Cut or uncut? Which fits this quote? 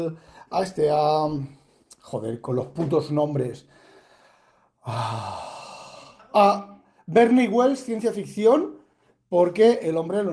uncut